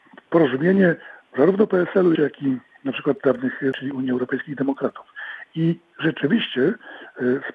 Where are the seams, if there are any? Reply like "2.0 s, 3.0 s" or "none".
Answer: 2.1 s, 3.7 s

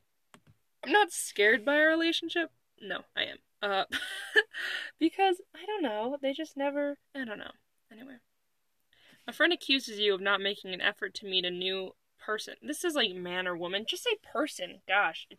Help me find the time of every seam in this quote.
2.8 s, 7.1 s

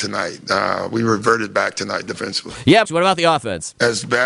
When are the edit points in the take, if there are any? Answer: 2.8 s

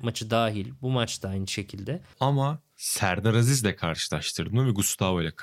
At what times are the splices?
2.1 s

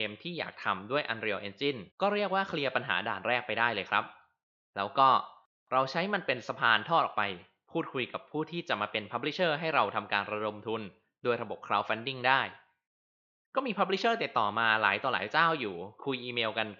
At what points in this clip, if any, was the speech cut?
1.9 s

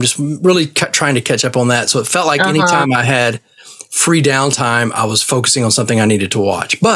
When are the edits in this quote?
none

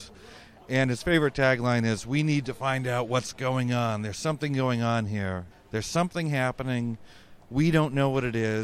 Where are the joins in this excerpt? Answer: 5.5 s

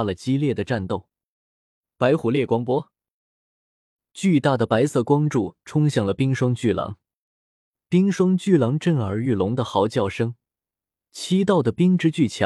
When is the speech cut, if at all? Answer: 7.8 s

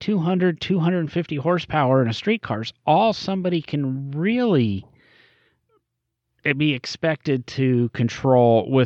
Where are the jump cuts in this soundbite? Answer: none

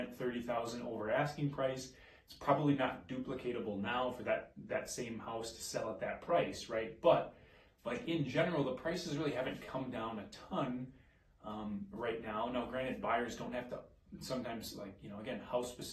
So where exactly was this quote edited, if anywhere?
none

